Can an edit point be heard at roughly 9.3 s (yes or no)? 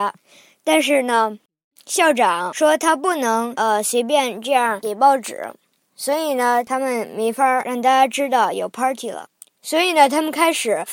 no